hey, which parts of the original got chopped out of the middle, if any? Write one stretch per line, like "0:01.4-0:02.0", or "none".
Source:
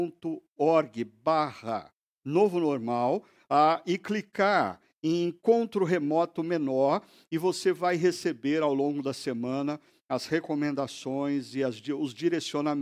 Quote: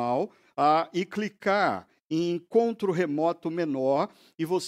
none

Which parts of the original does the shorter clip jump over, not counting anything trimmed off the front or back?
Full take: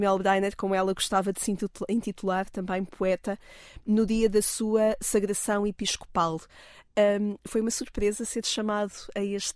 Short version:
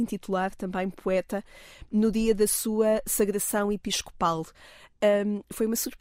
none

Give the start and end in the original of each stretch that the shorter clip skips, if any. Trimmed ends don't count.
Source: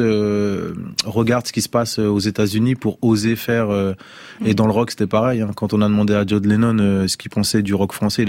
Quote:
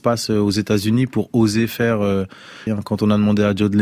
0:04.4-0:05.4

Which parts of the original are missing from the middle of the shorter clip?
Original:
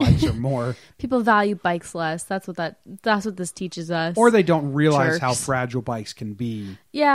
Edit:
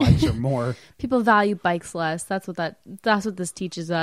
none

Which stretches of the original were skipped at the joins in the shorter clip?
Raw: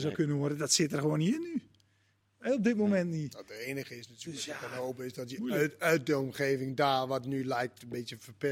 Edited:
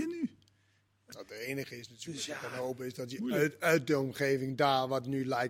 0:02.4-0:03.3

